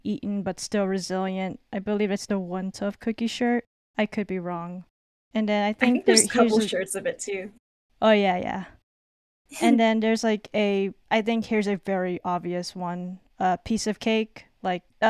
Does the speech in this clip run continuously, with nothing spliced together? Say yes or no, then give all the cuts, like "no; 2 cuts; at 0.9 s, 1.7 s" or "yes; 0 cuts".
yes; 0 cuts